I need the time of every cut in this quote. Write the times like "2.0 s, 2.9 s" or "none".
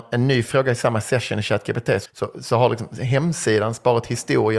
2.1 s